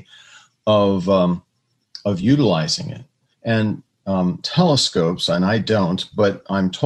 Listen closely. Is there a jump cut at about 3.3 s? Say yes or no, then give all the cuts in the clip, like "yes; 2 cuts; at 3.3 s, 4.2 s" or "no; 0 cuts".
yes; 2 cuts; at 3.3 s, 4.4 s